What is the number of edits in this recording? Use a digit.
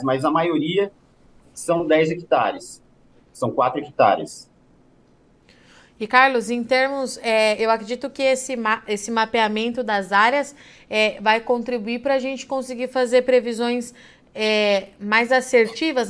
0